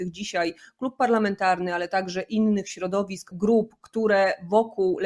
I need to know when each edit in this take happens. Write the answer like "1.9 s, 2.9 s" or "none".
3.3 s